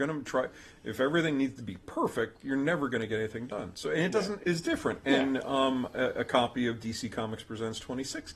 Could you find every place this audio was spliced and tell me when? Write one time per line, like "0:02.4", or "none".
0:04.4